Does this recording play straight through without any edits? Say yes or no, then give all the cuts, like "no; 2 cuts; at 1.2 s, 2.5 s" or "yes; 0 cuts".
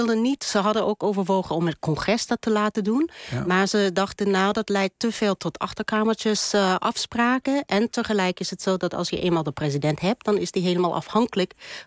yes; 0 cuts